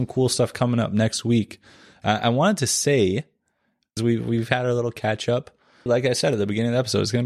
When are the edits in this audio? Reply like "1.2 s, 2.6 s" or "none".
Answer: 4.0 s, 5.9 s